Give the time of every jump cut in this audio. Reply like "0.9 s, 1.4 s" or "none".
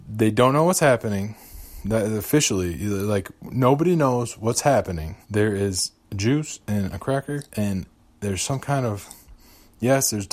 5.2 s, 7.5 s

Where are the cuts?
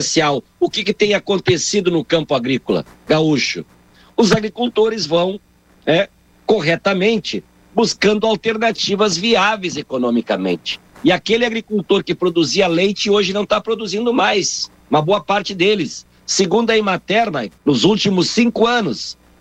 17.6 s

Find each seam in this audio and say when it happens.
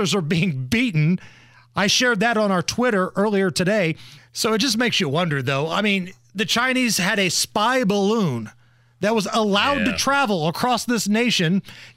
4.2 s

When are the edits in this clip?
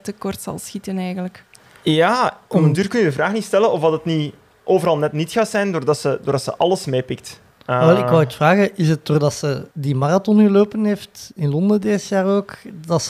9.7 s

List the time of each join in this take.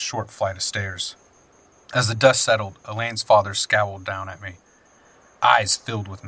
none

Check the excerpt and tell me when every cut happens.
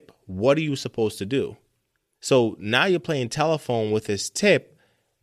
2.1 s

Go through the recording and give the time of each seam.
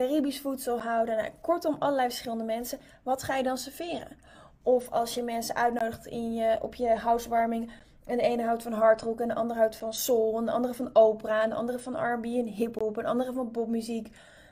none

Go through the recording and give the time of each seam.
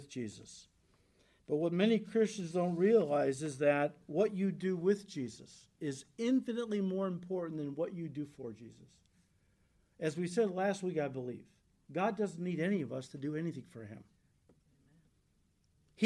none

